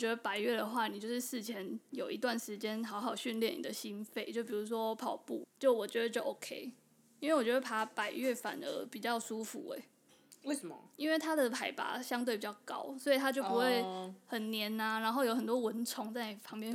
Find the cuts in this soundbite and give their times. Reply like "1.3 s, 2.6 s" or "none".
5.4 s